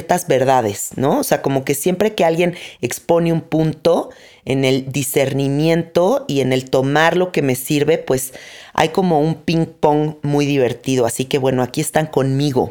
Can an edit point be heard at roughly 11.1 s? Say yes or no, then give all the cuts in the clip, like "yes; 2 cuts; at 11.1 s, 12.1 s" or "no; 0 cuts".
no; 0 cuts